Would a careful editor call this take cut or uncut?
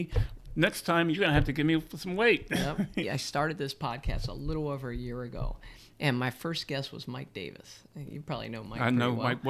cut